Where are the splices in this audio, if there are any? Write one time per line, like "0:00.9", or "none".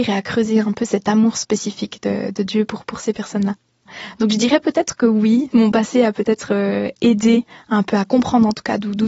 0:05.5